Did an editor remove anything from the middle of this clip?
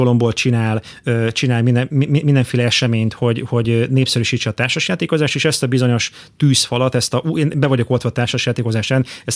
no; 0 cuts

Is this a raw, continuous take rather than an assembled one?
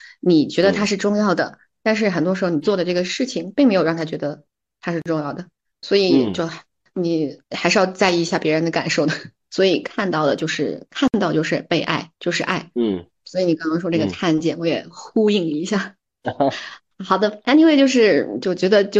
no; 2 cuts; at 9.4 s, 12.2 s

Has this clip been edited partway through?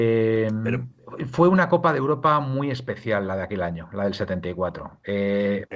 no; 0 cuts

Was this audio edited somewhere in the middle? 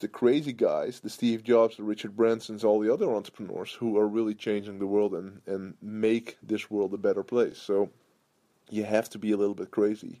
no; 0 cuts

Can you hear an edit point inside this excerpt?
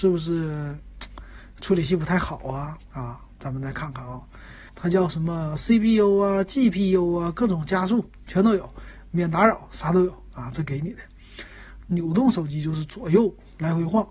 yes; 2 cuts; at 4.7 s, 11.8 s

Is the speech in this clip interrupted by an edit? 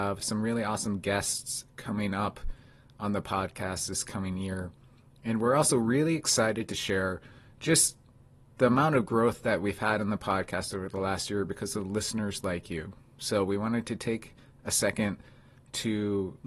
no; 0 cuts

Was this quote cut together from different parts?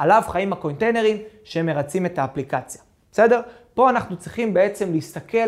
no; 0 cuts

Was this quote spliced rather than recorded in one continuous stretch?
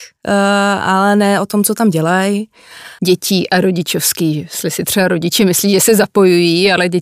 yes; 1 cut; at 3.0 s

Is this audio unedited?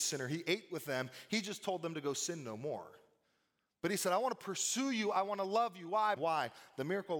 no; 1 cut; at 6.2 s

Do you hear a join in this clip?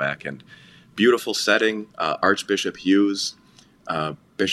yes; 1 cut; at 1.9 s

